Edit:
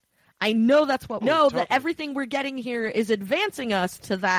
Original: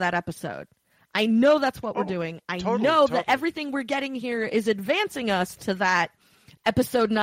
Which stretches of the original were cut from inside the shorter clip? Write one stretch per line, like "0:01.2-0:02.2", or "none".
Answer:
0:01.9-0:02.8